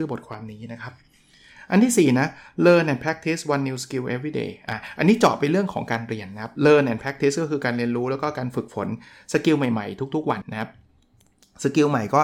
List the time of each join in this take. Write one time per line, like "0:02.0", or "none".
0:10.4